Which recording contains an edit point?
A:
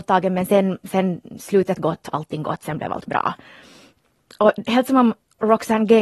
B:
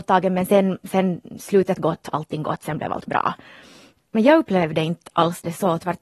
B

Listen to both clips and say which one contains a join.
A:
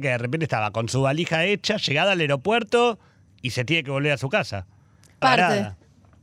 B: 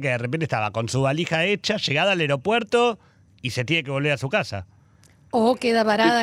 A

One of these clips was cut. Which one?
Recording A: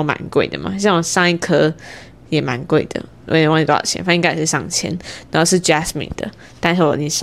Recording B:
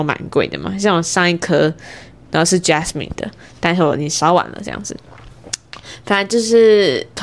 B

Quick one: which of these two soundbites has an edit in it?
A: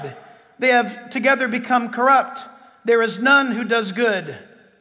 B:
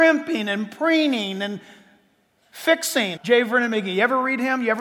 B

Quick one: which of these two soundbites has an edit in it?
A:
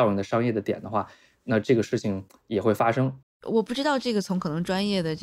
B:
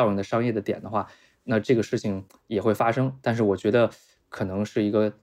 A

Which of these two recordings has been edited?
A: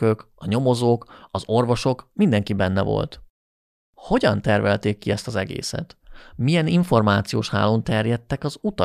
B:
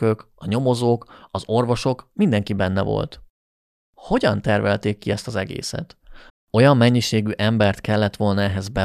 B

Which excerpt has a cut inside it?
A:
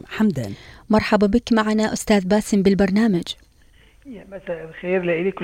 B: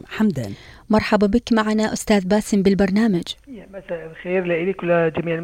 B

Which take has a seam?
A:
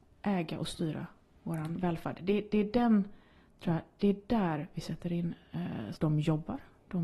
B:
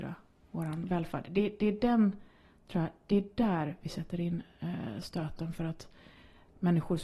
A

